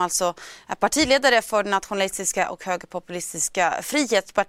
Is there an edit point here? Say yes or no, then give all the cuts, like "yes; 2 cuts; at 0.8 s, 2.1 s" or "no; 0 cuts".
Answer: no; 0 cuts